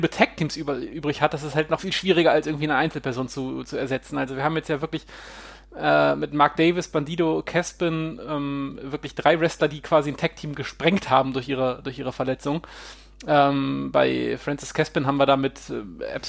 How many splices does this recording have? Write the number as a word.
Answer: one